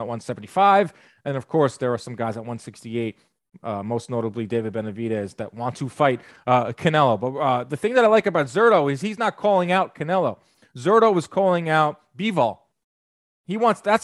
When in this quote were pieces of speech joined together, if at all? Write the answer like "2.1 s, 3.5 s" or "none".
none